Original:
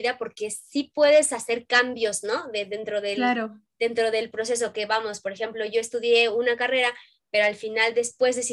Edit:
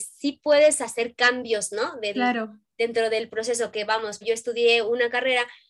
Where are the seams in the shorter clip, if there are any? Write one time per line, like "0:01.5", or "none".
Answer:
0:02.1
0:04.2

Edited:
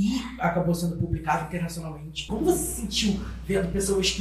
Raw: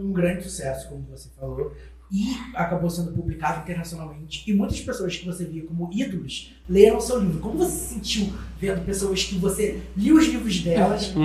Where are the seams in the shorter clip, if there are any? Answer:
0:02.3

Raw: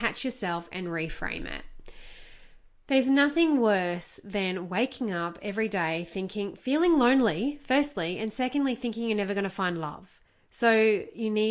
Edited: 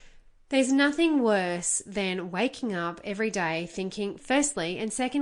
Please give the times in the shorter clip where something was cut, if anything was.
0:04.2

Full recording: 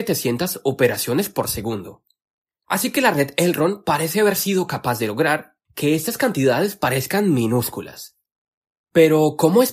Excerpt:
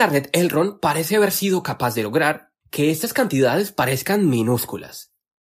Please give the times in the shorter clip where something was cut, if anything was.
none

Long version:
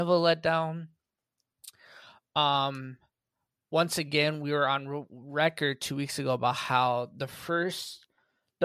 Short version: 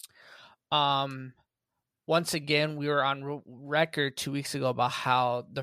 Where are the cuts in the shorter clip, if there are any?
none

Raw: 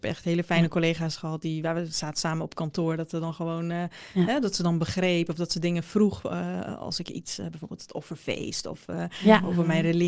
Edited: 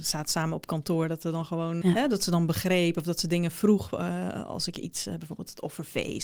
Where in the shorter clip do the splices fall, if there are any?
0:01.8

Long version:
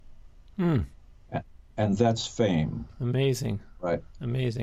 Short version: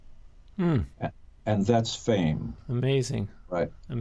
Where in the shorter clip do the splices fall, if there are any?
0:00.9

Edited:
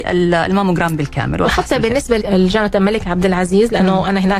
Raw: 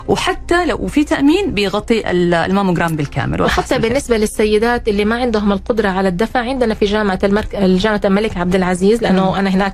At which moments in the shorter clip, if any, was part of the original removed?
0:02.2

